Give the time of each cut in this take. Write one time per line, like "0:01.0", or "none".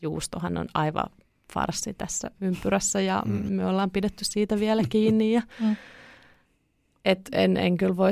none